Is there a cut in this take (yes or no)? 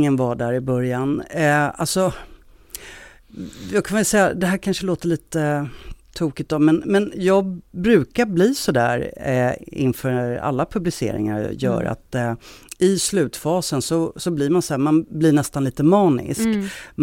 no